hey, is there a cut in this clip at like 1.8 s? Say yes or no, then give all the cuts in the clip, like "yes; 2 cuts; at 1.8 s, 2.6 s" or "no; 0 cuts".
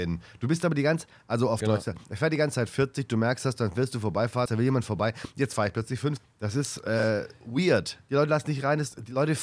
no; 3 cuts; at 4.5 s, 6.2 s, 8.0 s